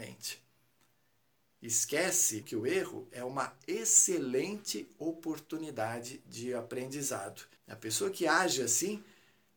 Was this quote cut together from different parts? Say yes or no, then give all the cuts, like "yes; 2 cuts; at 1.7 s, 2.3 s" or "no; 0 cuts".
yes; 2 cuts; at 2.4 s, 7.6 s